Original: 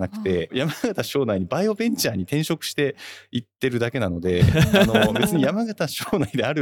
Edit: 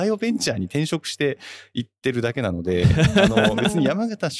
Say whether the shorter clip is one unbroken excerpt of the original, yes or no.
yes